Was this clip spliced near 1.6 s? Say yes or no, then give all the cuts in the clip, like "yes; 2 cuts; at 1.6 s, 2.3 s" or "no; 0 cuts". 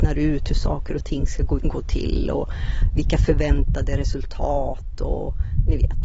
yes; 1 cut; at 1.6 s